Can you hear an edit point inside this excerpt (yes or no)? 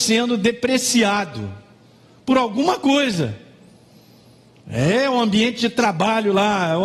no